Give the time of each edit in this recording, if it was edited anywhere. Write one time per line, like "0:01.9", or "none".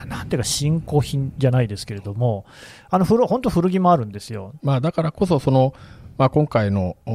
0:04.6